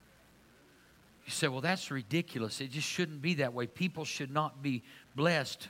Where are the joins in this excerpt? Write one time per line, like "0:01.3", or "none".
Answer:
none